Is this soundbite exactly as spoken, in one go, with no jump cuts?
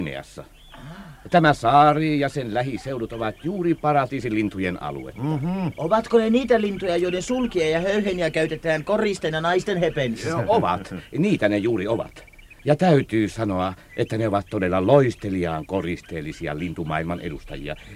no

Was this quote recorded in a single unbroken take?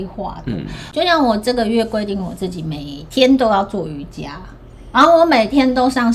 no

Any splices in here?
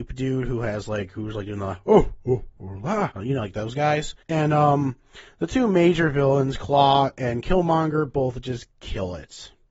yes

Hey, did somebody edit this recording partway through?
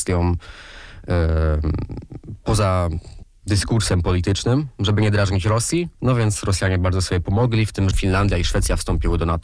yes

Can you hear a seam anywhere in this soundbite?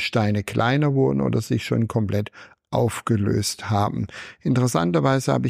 no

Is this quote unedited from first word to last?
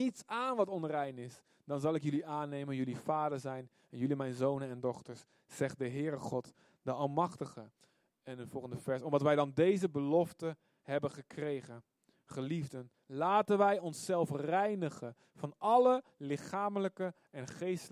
yes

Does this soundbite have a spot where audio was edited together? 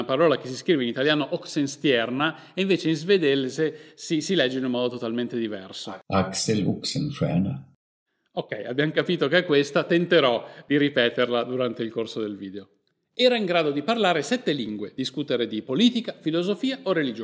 no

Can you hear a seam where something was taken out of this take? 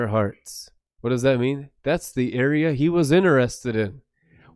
no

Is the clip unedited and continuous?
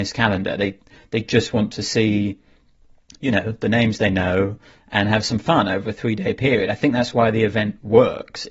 yes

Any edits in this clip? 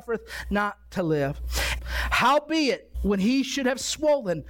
yes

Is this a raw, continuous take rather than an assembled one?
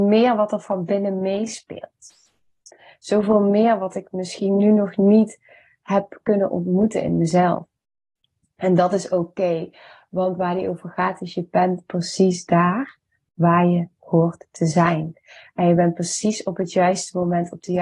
yes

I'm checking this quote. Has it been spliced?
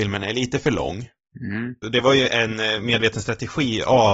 yes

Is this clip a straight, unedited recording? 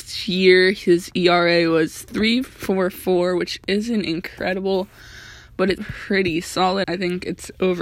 no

